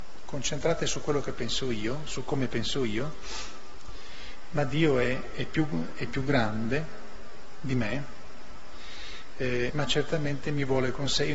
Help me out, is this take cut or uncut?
cut